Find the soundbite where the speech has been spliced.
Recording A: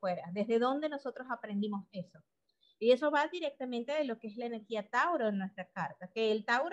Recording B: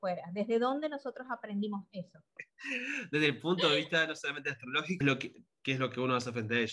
B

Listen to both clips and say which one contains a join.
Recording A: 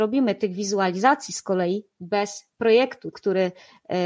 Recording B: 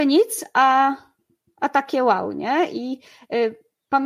A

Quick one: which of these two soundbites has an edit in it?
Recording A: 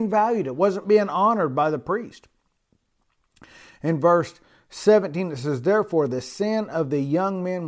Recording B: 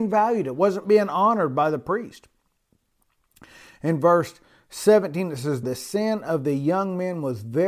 B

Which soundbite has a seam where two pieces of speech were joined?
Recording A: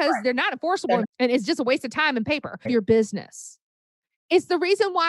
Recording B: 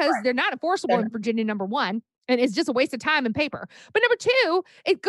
A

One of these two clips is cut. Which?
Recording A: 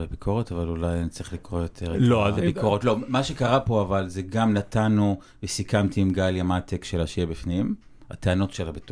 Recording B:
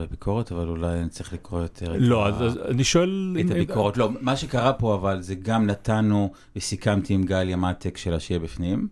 A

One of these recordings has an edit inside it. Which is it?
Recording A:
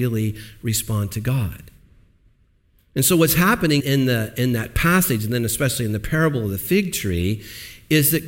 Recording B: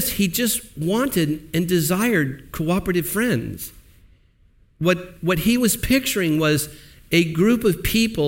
A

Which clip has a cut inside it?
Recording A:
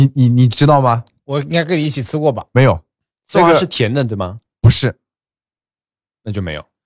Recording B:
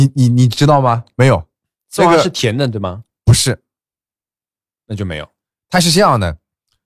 B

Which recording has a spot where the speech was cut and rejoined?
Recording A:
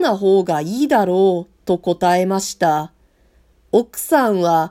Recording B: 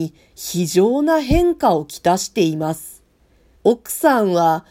B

